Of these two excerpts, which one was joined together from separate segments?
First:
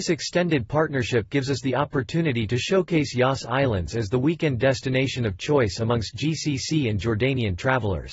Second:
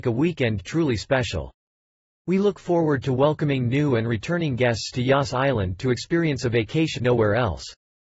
second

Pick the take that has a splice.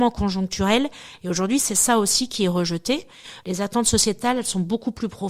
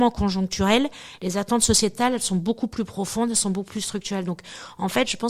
first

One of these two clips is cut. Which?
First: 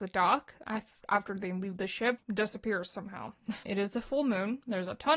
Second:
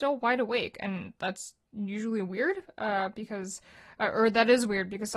first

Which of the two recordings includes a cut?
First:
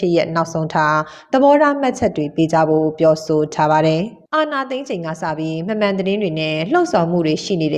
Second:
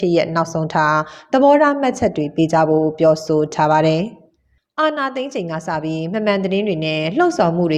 first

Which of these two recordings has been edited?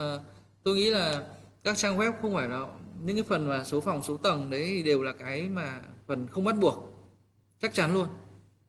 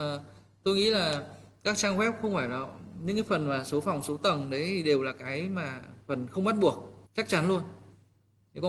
second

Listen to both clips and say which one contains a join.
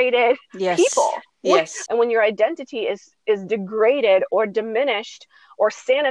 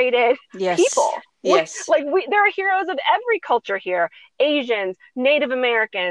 first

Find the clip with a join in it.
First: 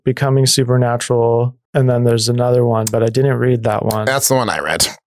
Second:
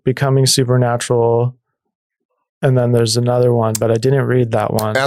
first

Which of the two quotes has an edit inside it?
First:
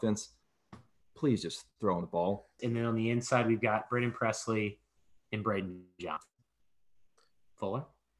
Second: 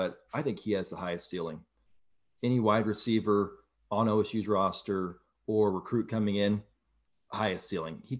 first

